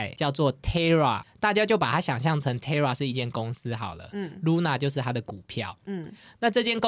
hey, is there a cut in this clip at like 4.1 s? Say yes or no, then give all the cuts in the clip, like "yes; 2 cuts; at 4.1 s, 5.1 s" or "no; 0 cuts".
no; 1 cut; at 1.2 s